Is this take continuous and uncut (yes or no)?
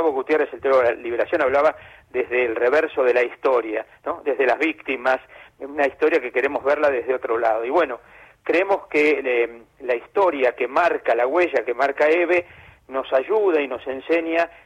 yes